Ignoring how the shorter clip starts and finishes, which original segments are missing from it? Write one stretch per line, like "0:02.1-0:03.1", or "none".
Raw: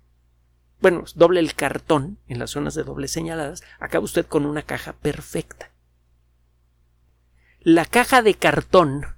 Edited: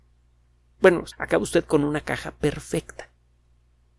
0:01.1-0:03.7